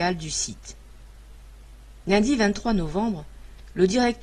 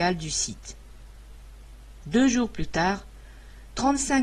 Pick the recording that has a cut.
first; 1 cut; at 2.0 s

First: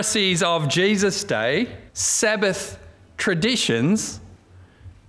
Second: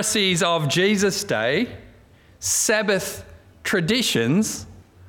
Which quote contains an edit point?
first; 1 cut; at 1.9 s

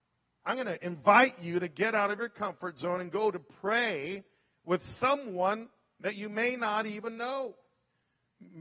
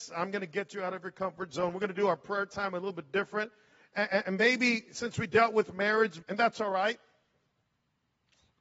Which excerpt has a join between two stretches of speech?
second; 1 cut; at 6.2 s

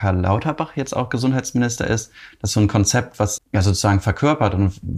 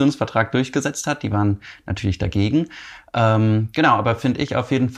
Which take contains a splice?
first; 1 cut; at 3.4 s

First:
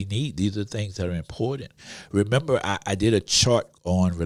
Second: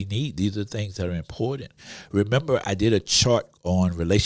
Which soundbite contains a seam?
second; 1 cut; at 2.6 s

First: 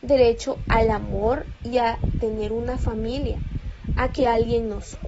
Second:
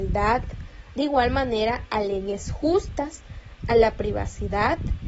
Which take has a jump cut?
second; 1 cut; at 0.9 s

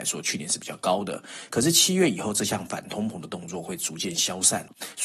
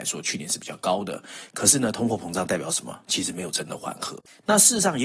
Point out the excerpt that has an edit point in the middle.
second; 1 cut; at 1.5 s

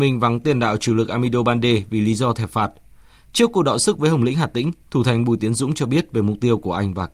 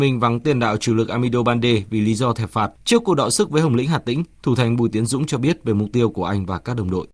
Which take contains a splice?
second; 1 cut; at 2.8 s

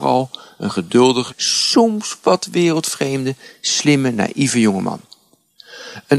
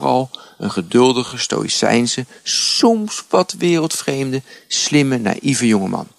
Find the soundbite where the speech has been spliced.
first; 1 cut; at 1.3 s

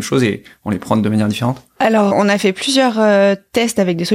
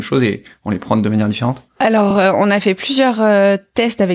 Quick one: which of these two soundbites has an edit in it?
first; 1 cut; at 2.1 s

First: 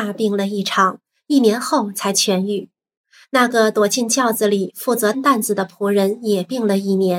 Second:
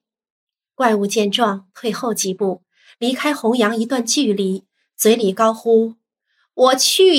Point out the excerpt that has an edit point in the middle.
first; 1 cut; at 5.1 s

